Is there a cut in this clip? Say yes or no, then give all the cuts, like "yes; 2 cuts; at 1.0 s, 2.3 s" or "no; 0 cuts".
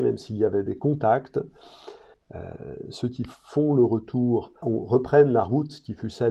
yes; 2 cuts; at 2.1 s, 4.6 s